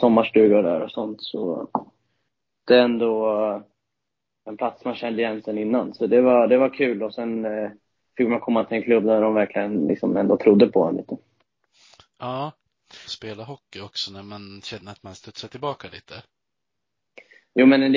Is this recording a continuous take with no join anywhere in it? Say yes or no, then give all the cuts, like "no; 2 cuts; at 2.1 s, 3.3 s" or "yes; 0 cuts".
no; 1 cut; at 13.1 s